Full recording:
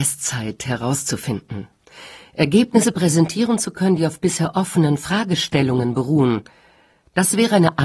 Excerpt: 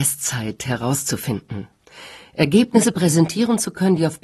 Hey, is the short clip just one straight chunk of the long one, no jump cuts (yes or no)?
yes